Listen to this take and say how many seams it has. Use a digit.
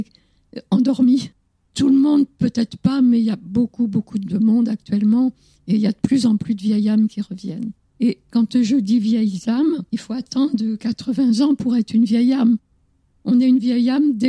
2